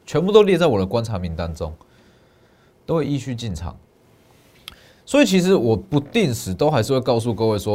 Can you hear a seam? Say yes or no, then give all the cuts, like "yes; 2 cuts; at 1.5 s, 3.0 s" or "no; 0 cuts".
no; 0 cuts